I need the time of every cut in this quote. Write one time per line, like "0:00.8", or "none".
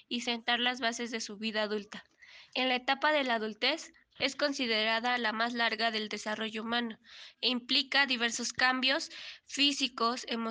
0:02.5
0:04.2